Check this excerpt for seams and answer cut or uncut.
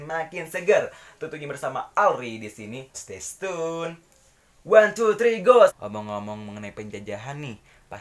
cut